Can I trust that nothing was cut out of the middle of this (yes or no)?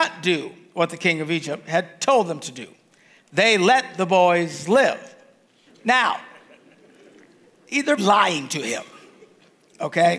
no